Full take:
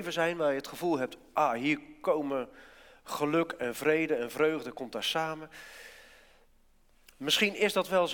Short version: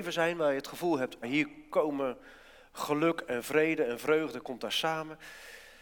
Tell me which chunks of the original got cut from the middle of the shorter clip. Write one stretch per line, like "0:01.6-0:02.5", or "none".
0:01.2-0:01.5